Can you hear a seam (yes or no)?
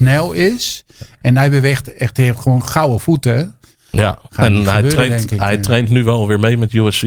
yes